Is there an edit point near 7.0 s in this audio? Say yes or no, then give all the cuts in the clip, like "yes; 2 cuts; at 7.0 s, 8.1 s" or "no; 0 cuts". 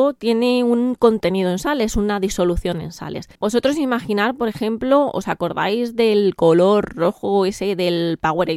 no; 1 cut; at 3.3 s